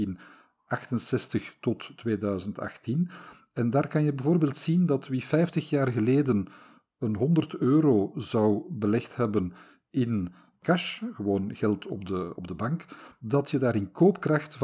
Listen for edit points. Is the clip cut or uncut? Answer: uncut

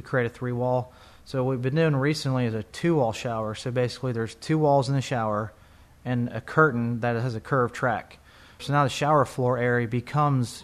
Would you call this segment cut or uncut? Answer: cut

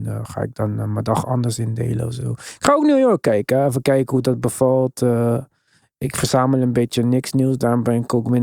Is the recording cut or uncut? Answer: uncut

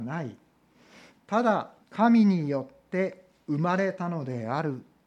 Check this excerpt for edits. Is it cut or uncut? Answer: cut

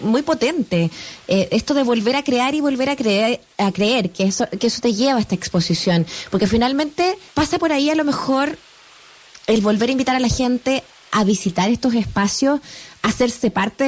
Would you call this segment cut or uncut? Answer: cut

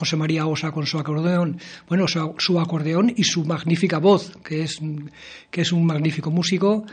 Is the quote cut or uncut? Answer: uncut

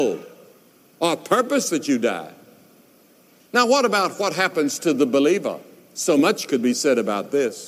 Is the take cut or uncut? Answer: cut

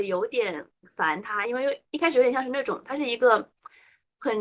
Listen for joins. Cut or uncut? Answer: uncut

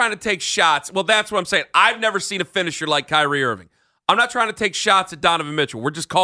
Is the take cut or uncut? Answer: uncut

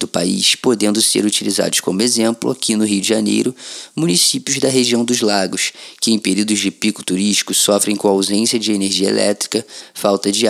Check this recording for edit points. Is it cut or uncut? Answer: uncut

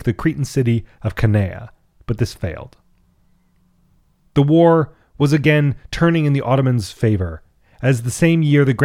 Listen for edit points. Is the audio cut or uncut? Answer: uncut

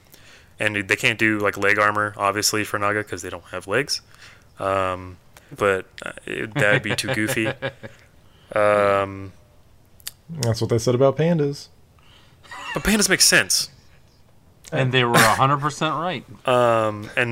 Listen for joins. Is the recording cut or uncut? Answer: cut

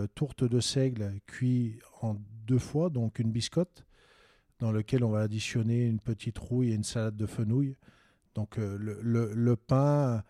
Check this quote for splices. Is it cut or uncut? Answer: uncut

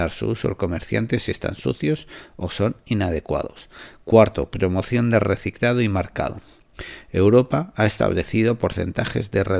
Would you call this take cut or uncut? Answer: uncut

